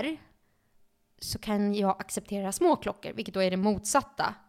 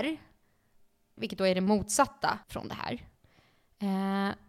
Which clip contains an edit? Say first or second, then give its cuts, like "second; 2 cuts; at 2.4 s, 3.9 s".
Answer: second; 2 cuts; at 1.2 s, 2.4 s